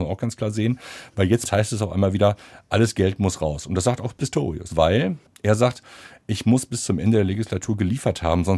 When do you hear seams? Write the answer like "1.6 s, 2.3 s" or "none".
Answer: 4.7 s